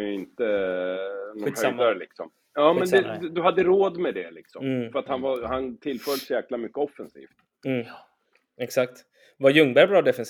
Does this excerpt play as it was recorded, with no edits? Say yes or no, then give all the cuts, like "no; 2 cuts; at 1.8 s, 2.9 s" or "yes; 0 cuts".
yes; 0 cuts